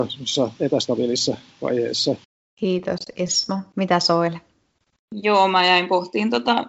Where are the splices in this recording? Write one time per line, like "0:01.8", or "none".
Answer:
none